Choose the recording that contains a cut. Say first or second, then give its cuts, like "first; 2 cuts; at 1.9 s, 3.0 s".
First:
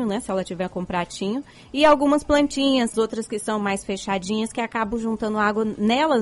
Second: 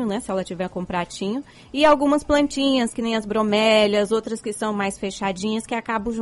first; 1 cut; at 2.9 s